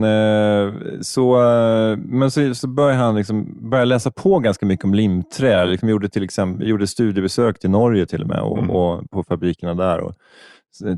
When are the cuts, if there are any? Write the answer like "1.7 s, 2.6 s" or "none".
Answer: none